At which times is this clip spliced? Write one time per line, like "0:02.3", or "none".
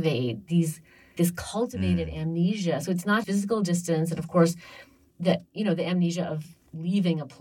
0:01.2
0:03.2
0:05.1